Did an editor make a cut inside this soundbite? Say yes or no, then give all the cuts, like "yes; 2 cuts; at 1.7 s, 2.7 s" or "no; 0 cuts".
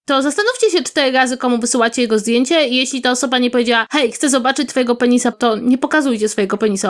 yes; 1 cut; at 5.3 s